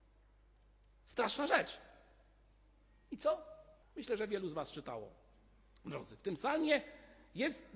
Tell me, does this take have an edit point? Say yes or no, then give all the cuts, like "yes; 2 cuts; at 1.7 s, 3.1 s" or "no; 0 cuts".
yes; 1 cut; at 3.8 s